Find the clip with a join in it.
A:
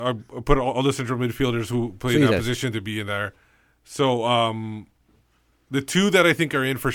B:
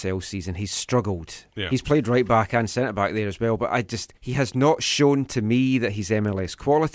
B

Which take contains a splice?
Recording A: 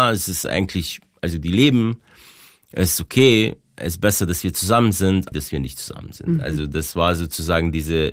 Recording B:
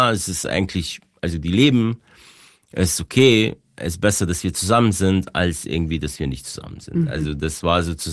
A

